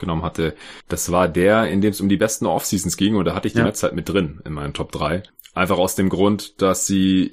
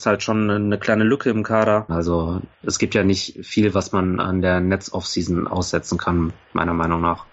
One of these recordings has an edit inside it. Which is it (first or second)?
second